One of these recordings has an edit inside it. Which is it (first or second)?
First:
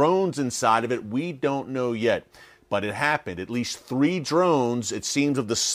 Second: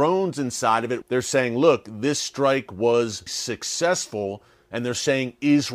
second